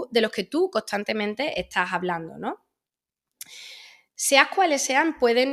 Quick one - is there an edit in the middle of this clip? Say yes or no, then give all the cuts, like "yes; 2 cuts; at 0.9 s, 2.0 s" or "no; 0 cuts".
no; 0 cuts